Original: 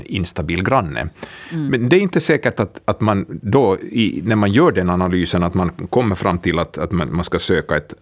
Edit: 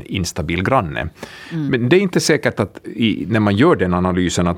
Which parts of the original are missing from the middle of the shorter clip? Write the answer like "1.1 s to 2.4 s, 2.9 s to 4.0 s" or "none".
2.8 s to 3.8 s